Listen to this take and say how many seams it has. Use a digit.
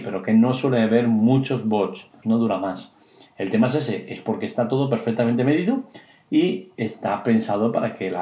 1